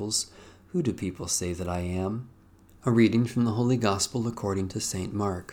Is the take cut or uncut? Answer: cut